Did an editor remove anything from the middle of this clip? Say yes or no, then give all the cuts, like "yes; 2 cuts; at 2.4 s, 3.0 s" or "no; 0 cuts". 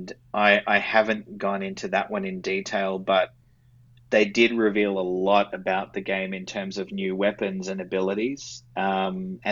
no; 0 cuts